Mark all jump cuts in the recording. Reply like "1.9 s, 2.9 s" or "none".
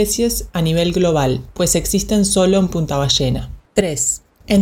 3.6 s